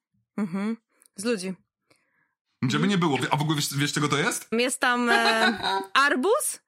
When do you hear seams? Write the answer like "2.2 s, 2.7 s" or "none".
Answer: 4.5 s